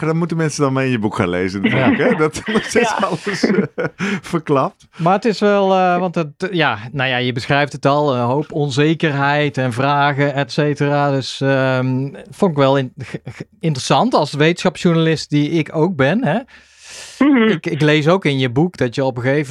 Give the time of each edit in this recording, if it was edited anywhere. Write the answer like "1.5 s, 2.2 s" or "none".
2.4 s